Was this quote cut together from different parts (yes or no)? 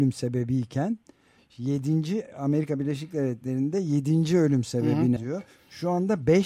yes